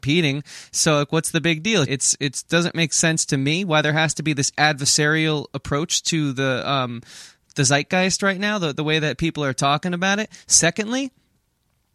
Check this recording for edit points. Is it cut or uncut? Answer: cut